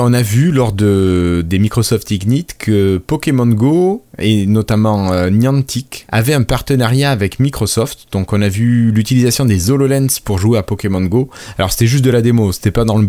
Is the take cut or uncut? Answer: cut